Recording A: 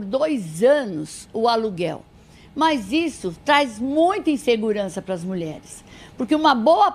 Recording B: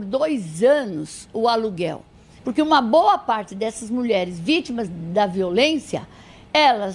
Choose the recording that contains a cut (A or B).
B